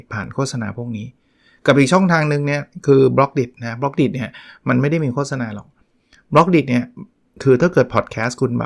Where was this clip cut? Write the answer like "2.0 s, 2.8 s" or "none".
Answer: none

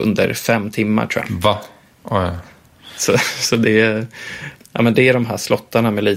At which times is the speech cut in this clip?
4.6 s

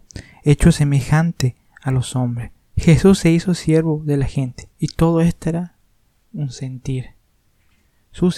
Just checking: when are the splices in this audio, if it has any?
2.6 s, 4.7 s

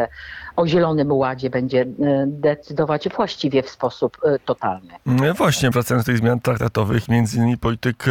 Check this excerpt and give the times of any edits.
5.7 s, 7.1 s

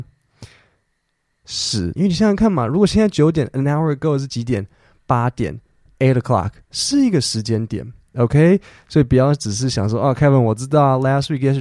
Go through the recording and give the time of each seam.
2.0 s, 8.1 s

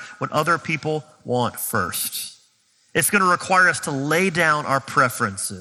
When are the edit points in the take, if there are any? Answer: none

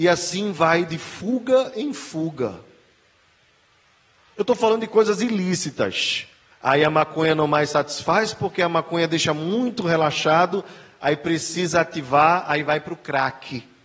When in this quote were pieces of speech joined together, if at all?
6.5 s

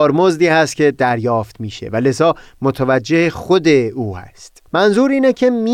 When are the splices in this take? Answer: 4.7 s

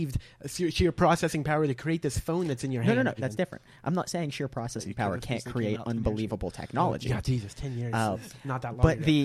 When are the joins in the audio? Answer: 3.2 s

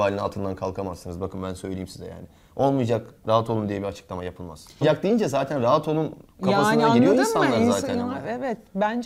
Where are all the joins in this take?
4.8 s

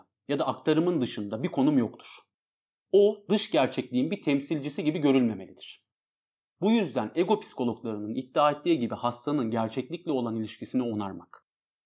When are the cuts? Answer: none

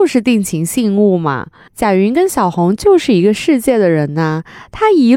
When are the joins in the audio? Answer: 1.7 s

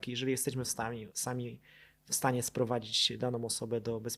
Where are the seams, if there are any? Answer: 1.1 s

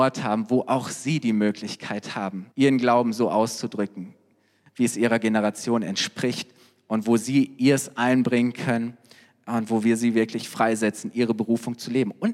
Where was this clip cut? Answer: 2.5 s

